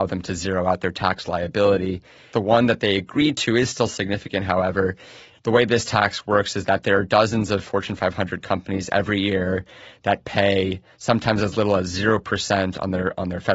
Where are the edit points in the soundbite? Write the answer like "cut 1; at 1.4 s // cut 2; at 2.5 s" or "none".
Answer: cut 1; at 2.3 s // cut 2; at 5.3 s